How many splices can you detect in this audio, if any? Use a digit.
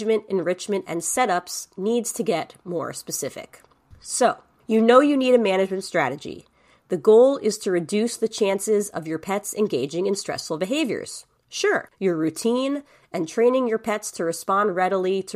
1